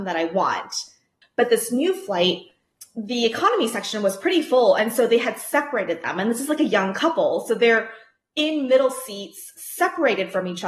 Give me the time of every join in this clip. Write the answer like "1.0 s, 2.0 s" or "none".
1.2 s